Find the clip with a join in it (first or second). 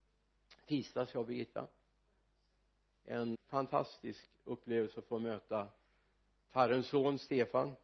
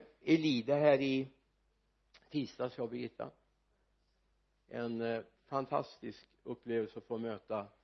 first